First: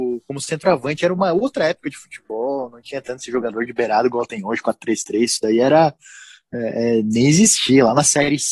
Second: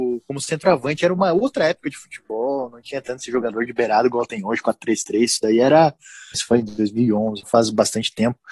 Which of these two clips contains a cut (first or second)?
second